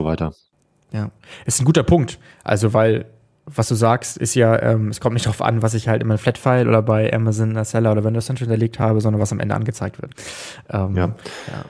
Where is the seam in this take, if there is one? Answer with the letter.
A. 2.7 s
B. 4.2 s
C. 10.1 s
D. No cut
C